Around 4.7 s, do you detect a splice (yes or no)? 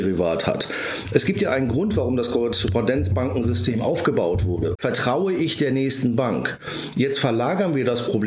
yes